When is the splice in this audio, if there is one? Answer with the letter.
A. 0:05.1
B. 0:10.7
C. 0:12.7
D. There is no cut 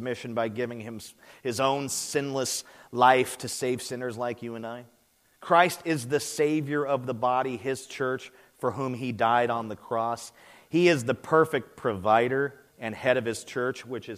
C